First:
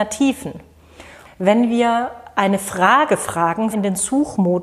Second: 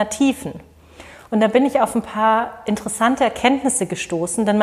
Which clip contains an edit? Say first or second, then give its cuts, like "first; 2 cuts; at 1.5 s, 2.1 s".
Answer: first; 2 cuts; at 1.2 s, 3.7 s